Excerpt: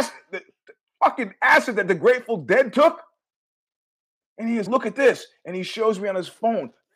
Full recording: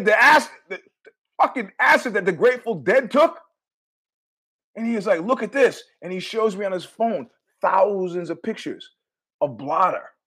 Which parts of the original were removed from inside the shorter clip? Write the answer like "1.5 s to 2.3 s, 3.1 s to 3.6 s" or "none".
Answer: 5.0 s to 5.2 s

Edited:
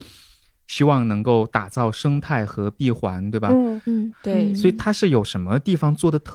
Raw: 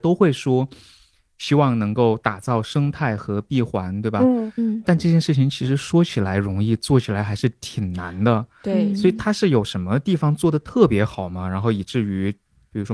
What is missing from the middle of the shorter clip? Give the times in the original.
4.8 s to 8.5 s

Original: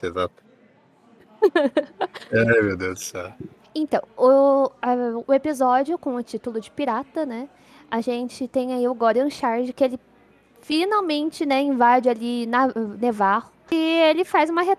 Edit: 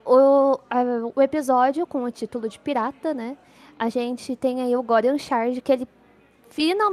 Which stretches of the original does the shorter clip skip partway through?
none

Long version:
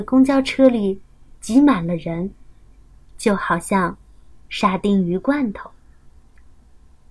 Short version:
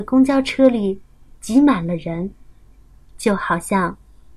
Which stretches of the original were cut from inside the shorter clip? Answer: none

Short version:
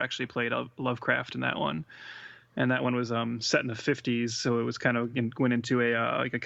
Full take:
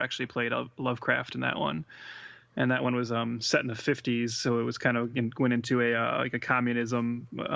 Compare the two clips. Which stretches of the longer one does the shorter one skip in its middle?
none

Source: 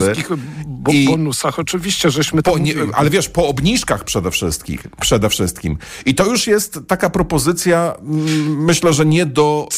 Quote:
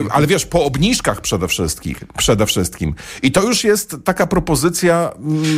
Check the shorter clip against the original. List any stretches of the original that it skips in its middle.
none

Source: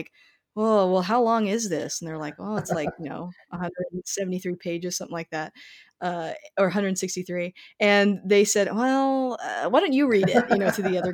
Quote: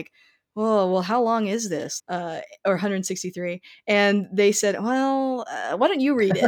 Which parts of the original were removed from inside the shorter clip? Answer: 2.0 s to 5.9 s

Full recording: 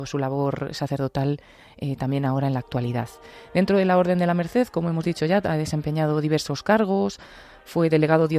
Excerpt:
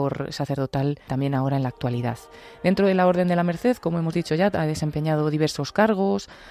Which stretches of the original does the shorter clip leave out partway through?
1.5 s to 2.0 s

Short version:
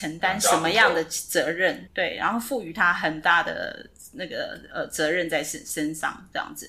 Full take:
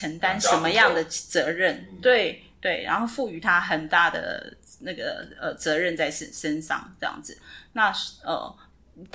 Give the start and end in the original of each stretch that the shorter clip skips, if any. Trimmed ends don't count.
1.9 s to 2.5 s

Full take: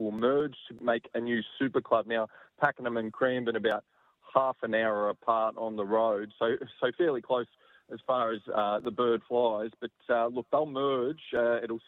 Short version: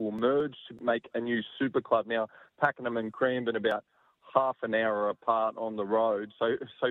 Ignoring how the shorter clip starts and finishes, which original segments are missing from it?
none

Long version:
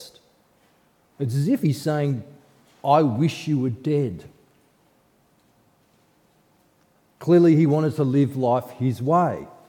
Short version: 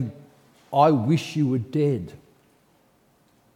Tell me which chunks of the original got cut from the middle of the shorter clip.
none

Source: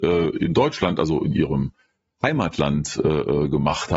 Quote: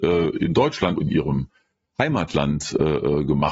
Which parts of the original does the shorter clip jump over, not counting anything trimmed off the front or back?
1.0 s to 1.2 s

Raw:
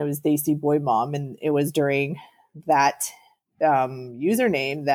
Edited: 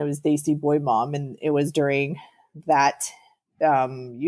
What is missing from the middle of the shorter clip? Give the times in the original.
none

